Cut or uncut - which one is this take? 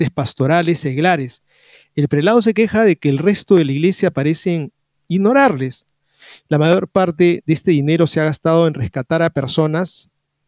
uncut